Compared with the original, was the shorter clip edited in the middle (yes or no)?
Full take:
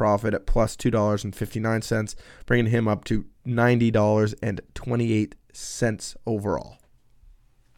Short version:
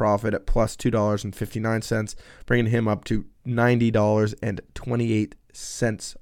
no